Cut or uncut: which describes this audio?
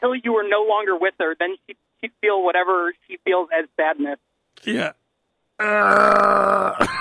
cut